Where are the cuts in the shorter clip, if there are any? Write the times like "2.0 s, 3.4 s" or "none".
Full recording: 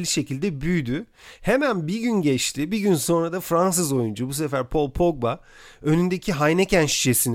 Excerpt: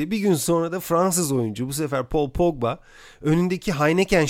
none